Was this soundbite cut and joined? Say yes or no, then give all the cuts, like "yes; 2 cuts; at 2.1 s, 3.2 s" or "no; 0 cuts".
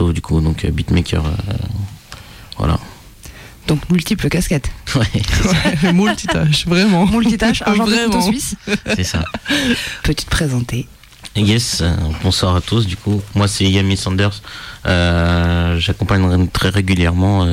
yes; 1 cut; at 10.0 s